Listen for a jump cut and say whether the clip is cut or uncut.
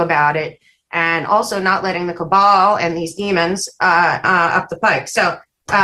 cut